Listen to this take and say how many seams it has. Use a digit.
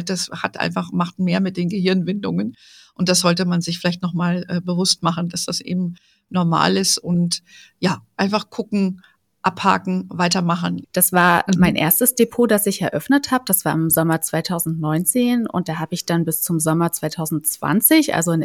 1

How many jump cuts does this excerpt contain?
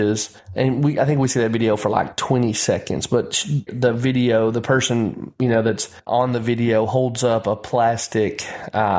2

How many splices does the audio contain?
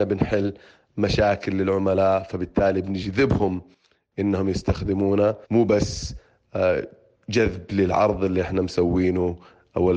1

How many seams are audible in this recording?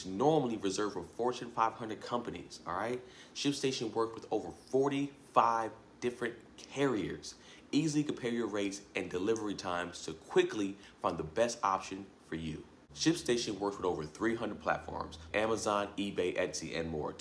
1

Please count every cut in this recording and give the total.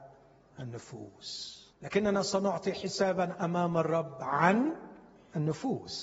1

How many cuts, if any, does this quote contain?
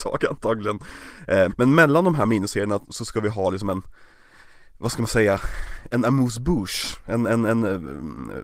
1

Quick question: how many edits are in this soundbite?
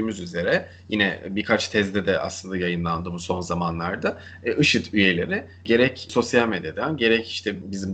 0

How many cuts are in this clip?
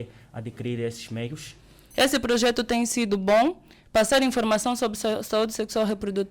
1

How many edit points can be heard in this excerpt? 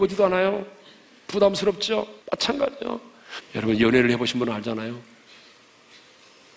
2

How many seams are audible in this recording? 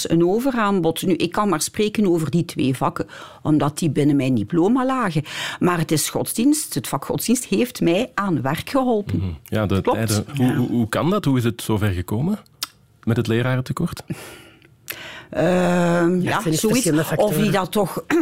2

